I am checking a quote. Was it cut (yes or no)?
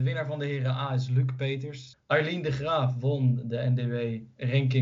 yes